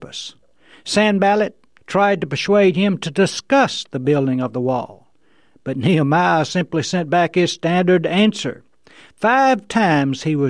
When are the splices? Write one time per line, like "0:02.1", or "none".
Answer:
0:01.8